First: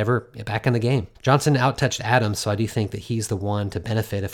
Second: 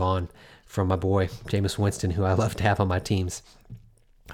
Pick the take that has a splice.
first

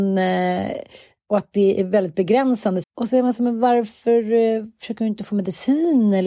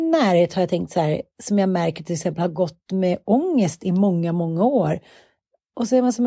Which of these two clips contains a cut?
first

